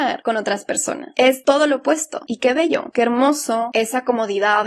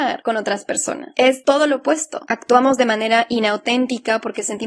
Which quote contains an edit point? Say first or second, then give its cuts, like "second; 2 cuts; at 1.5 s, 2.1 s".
first; 1 cut; at 2.3 s